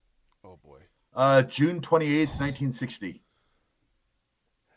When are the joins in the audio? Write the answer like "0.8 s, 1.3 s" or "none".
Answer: none

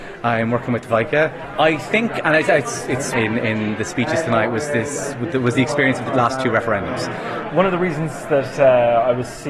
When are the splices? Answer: 1.5 s, 3.1 s, 7.5 s

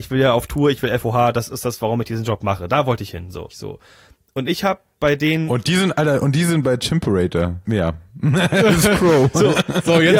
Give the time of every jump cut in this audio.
3.5 s, 7.7 s

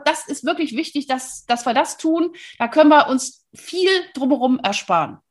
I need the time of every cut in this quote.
none

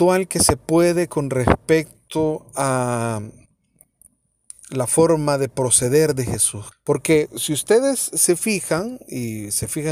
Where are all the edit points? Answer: 6.7 s

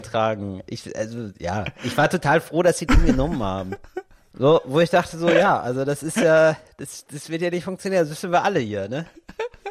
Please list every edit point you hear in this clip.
4.3 s

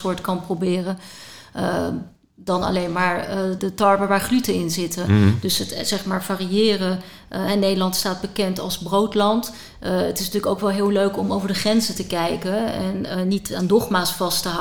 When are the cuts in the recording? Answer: 3.6 s

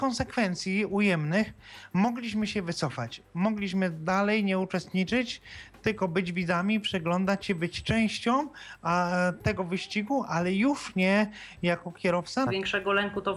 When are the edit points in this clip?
12.5 s

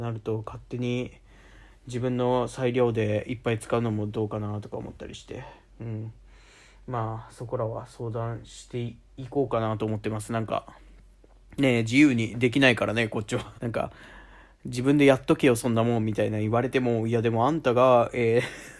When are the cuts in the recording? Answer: 13.6 s

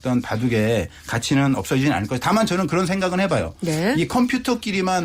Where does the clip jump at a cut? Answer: none

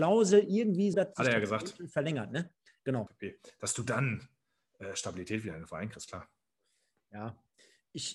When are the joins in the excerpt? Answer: 0.9 s, 3.1 s

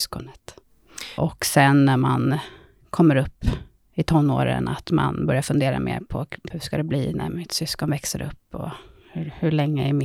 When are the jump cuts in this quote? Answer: 1.2 s, 6.5 s

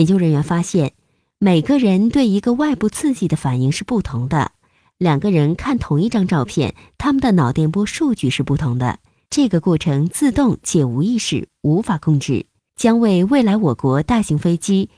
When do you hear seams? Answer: 12.6 s

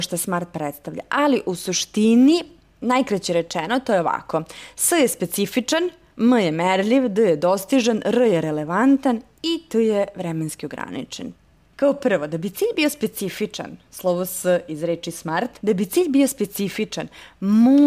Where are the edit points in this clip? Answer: none

